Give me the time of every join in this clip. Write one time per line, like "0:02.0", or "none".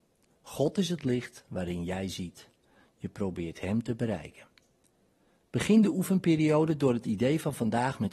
none